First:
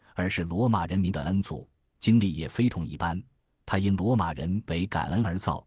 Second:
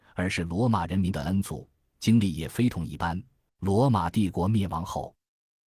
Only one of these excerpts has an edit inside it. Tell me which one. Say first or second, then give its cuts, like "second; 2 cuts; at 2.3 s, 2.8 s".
second; 1 cut; at 3.5 s